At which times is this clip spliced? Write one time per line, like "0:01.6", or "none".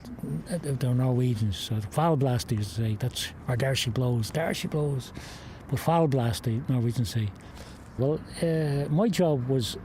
0:04.3
0:08.0